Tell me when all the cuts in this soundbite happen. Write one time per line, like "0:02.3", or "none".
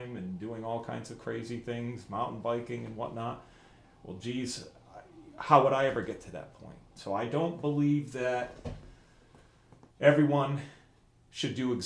0:03.8
0:07.0
0:09.9

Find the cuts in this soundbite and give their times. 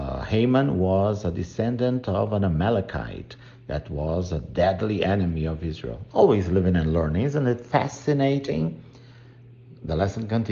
0:06.1

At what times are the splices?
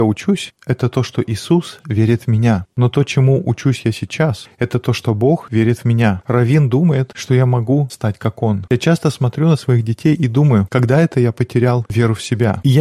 0:02.7

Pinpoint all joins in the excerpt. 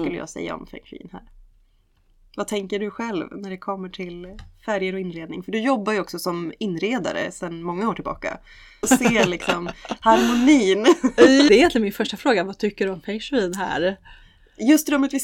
0:08.8
0:11.5

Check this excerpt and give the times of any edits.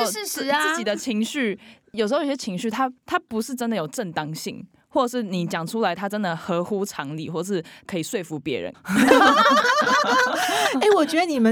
0:03.0
0:08.7

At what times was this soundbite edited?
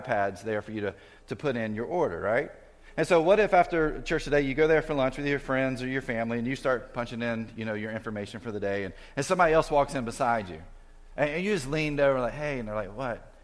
none

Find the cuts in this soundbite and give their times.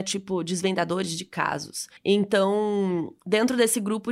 0:02.0

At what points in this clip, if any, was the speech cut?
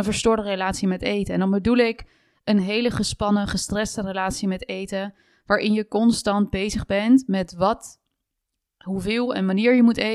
none

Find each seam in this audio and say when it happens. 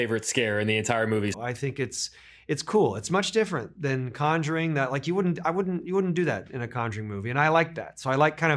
0:01.3

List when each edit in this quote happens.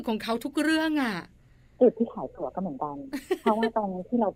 none

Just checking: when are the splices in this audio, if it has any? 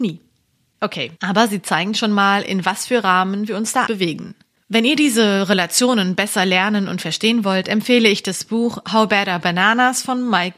0:01.2
0:03.9

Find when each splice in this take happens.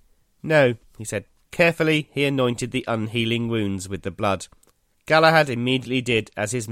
0:01.4
0:04.9

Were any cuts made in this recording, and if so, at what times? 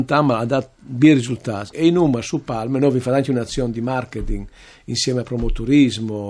0:01.7

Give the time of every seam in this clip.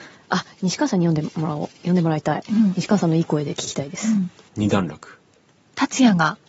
0:04.5

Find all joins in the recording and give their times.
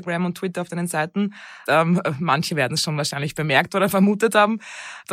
0:01.7

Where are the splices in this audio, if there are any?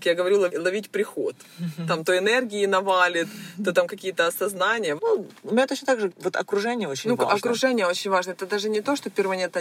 0:05.0
0:06.1

